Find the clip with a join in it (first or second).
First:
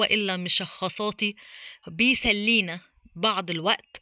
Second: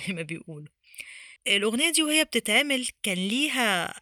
second